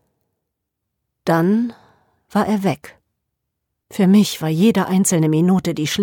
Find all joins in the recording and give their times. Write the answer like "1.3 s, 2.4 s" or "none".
3.8 s